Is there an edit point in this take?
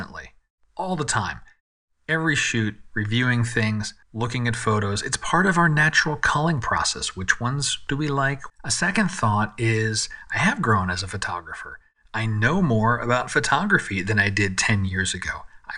yes; 2 cuts; at 4.0 s, 8.5 s

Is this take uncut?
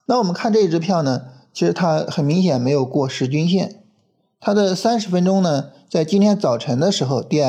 yes; 0 cuts

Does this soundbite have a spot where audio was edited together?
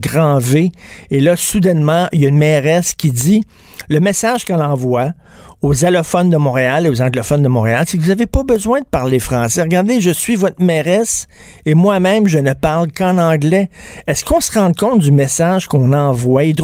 no; 0 cuts

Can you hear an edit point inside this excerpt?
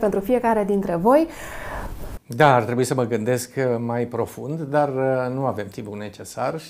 yes; 1 cut; at 2.2 s

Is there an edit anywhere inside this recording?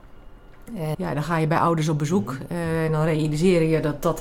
yes; 1 cut; at 0.9 s

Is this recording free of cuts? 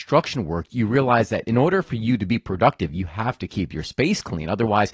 yes; 0 cuts

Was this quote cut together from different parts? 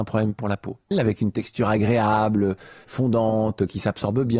yes; 1 cut; at 0.9 s

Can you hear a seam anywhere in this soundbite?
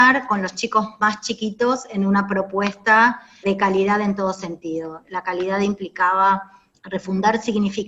yes; 2 cuts; at 3.4 s, 6.7 s

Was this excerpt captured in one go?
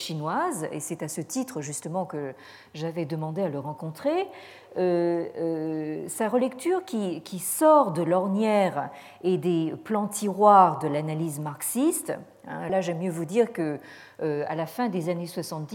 no; 1 cut; at 12.7 s

